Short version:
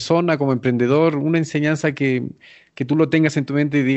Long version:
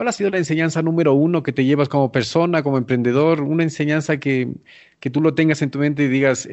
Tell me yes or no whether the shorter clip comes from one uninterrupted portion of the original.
yes